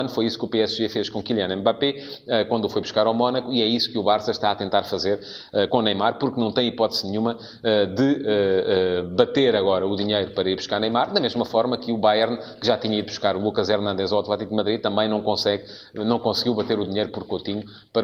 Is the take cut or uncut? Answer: uncut